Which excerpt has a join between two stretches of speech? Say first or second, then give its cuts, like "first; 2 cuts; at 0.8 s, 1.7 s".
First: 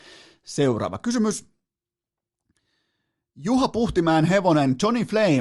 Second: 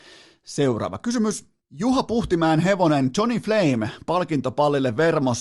second; 1 cut; at 1.6 s